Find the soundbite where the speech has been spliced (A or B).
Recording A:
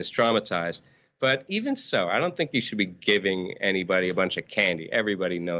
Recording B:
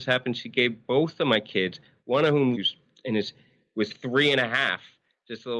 B